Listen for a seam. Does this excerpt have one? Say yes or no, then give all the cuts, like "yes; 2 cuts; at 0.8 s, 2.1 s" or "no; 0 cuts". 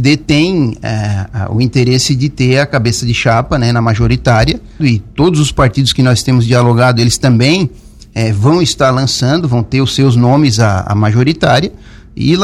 yes; 1 cut; at 4.8 s